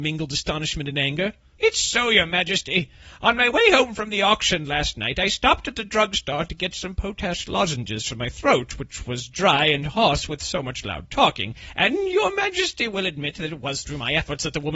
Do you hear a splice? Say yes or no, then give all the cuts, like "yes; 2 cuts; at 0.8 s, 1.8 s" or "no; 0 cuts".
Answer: no; 0 cuts